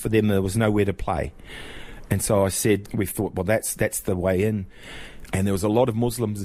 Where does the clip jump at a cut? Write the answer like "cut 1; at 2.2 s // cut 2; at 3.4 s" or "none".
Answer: cut 1; at 2.9 s // cut 2; at 5.3 s